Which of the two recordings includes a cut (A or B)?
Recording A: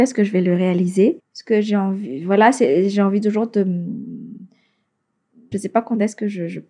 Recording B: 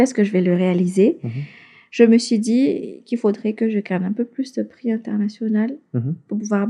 A